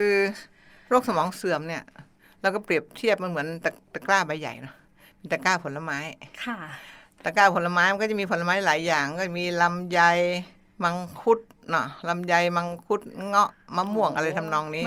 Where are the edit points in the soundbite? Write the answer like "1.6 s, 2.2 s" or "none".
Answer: none